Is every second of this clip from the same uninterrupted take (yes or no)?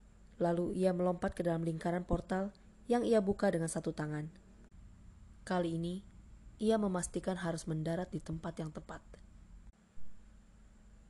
yes